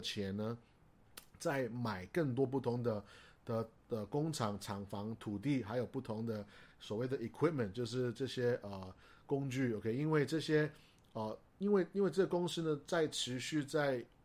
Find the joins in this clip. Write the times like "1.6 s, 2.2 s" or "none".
none